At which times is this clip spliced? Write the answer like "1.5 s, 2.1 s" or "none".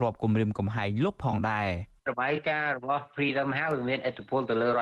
2.0 s